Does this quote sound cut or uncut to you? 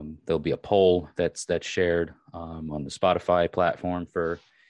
uncut